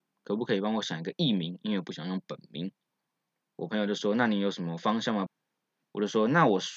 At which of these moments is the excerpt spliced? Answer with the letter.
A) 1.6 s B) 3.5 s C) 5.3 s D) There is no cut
C